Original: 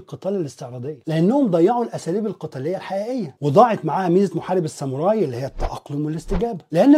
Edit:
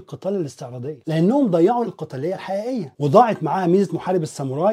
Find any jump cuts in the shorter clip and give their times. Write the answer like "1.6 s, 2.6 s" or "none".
1.9 s